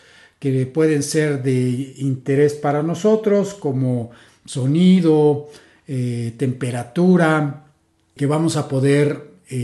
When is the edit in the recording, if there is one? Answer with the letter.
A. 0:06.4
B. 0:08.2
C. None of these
B